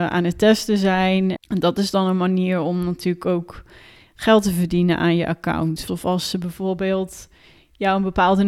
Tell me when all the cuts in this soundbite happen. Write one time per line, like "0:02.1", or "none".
0:01.4
0:05.9